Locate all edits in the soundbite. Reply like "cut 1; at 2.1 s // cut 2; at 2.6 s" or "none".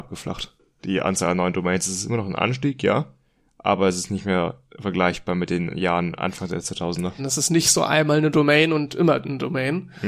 cut 1; at 7.2 s